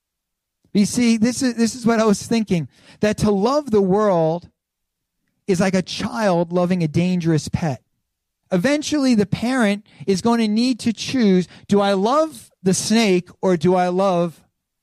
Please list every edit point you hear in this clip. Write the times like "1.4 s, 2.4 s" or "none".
8.4 s

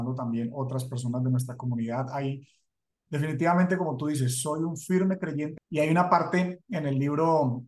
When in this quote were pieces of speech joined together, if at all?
5.6 s

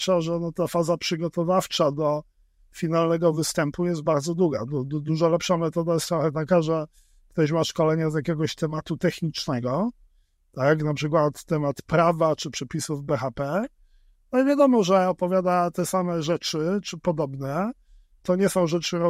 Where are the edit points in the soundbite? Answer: none

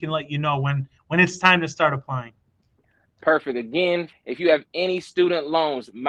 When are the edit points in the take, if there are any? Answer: 4.1 s

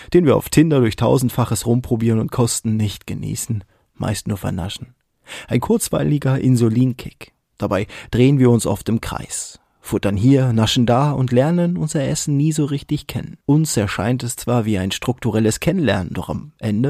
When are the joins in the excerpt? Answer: 13.4 s

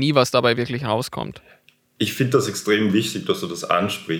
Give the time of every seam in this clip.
none

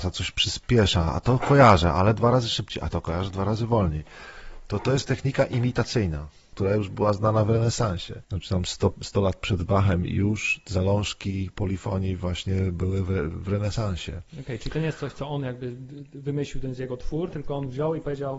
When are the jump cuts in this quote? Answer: none

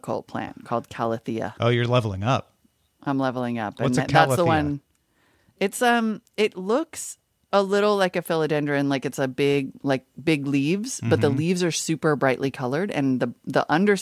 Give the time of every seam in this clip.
none

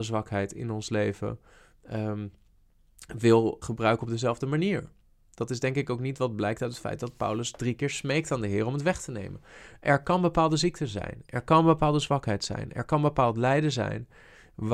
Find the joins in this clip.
3.6 s

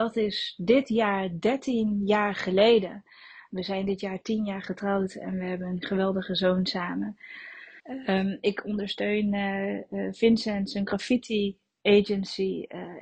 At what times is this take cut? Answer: 7.8 s

